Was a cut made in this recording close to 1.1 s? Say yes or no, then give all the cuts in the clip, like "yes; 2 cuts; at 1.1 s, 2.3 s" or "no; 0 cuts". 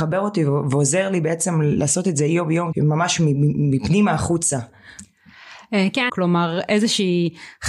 no; 2 cuts; at 2.7 s, 6.1 s